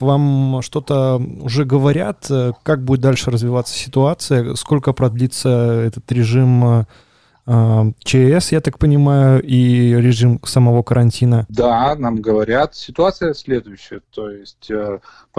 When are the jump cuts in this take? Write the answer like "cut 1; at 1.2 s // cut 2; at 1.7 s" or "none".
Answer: none